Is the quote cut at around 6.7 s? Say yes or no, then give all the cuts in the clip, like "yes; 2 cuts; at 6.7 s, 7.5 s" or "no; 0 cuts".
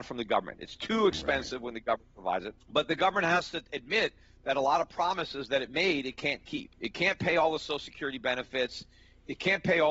yes; 2 cuts; at 2.6 s, 6.7 s